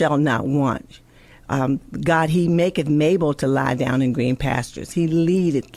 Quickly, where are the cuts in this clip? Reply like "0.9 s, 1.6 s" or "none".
none